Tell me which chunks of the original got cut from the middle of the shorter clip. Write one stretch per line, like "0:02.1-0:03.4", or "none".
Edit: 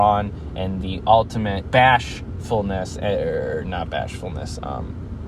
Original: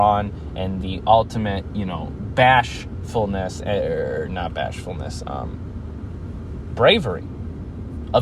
0:01.7-0:02.3